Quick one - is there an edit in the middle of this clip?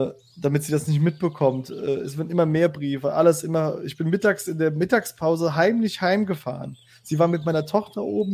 no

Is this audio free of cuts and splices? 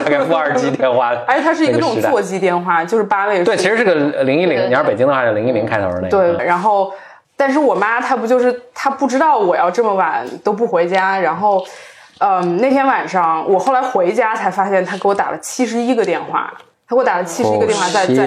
no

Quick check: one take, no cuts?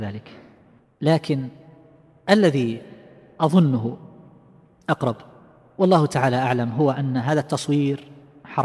yes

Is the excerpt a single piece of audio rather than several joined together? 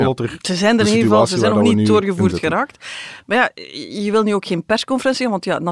yes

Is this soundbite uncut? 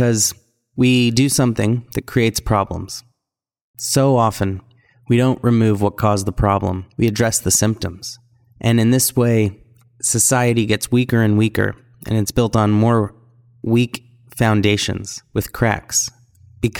no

